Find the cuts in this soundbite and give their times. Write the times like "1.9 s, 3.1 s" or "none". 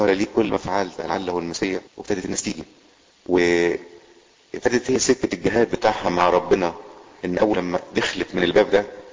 1.9 s